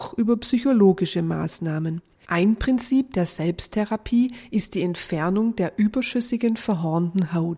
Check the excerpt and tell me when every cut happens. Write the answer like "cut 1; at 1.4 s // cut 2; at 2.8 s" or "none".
cut 1; at 2.3 s